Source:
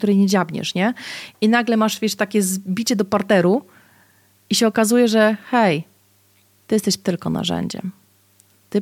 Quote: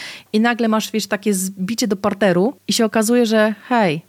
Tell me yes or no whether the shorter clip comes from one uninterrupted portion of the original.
no